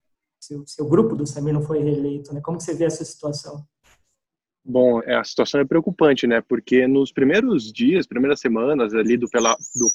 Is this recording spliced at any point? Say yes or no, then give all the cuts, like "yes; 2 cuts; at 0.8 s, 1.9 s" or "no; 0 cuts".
yes; 1 cut; at 5.0 s